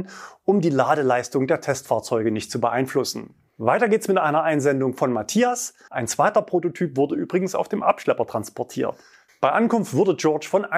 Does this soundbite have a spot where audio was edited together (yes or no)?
yes